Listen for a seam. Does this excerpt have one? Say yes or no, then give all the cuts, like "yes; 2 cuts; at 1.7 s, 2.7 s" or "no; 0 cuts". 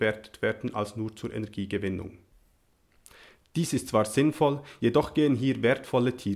no; 0 cuts